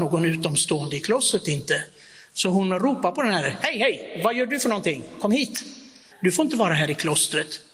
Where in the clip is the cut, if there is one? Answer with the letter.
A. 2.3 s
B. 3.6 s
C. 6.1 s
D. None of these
C